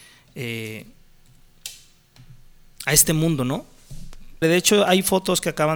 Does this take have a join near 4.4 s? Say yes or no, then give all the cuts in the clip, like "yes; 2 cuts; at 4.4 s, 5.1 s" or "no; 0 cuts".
yes; 1 cut; at 4.4 s